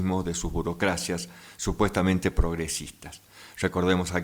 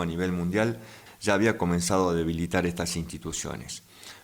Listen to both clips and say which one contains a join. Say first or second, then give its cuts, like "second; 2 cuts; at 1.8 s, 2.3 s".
second; 1 cut; at 1.1 s